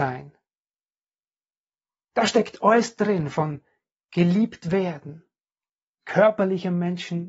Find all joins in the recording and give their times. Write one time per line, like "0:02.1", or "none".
0:02.1